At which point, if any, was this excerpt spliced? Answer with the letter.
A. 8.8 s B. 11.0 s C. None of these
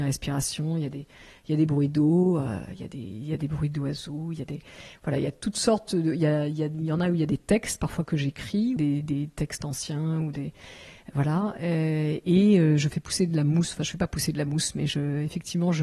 A